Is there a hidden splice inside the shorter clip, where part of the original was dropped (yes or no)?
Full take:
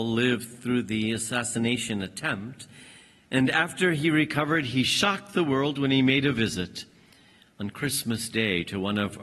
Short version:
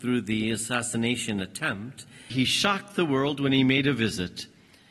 yes